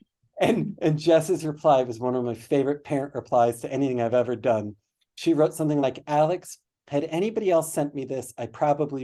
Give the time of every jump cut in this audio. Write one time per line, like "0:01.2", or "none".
none